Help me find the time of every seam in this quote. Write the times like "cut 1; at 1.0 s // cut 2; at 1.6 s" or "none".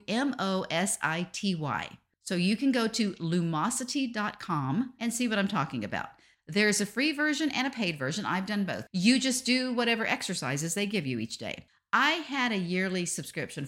cut 1; at 8.9 s

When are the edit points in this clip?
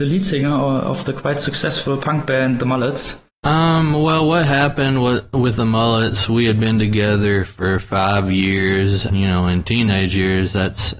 cut 1; at 3.3 s // cut 2; at 9.1 s

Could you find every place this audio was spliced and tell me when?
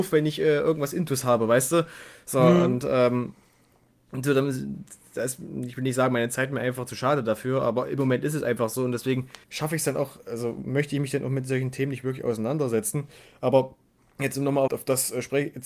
cut 1; at 9.4 s // cut 2; at 14.7 s

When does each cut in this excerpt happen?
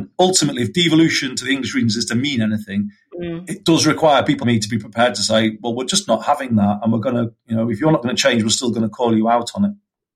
cut 1; at 4.4 s

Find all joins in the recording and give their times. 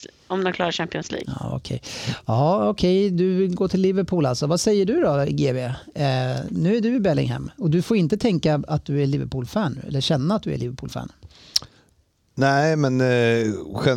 none

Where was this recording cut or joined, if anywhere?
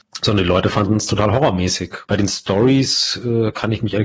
cut 1; at 2.0 s

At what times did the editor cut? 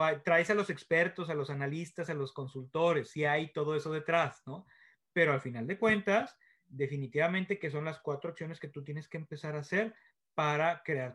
none

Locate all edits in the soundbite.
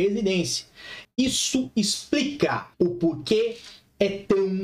cut 1; at 1.0 s // cut 2; at 2.7 s

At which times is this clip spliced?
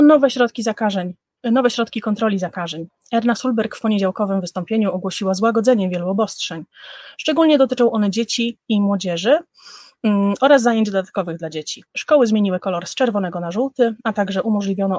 cut 1; at 11.9 s

